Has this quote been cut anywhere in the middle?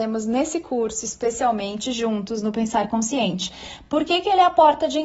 no; 0 cuts

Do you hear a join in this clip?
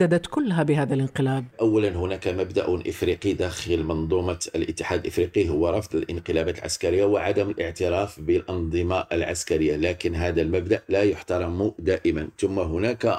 yes; 1 cut; at 1.5 s

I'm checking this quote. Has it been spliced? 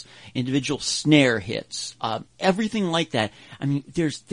yes; 1 cut; at 2.3 s

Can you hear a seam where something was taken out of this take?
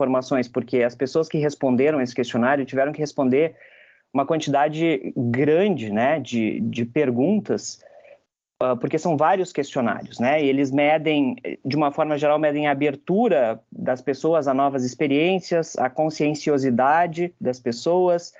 no; 0 cuts

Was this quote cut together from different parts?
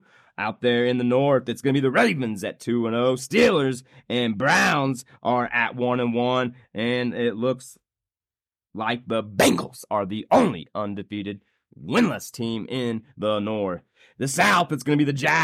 no; 0 cuts

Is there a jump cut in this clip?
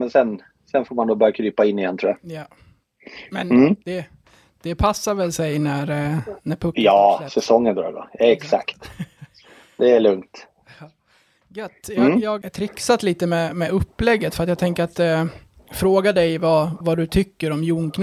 yes; 2 cuts; at 12.4 s, 16.8 s

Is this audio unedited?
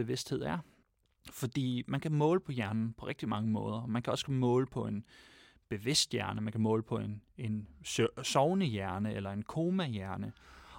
yes; 0 cuts

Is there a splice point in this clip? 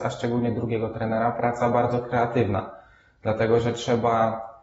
no; 0 cuts

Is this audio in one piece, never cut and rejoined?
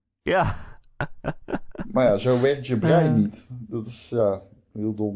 yes; 0 cuts

